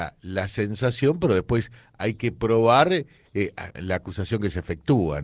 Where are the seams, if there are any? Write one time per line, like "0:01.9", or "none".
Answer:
0:03.7